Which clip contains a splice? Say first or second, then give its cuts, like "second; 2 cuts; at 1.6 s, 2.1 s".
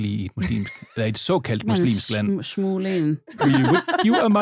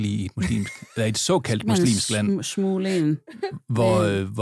first; 1 cut; at 3.4 s